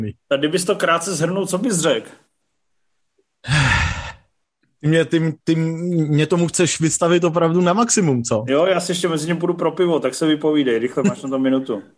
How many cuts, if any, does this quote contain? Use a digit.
0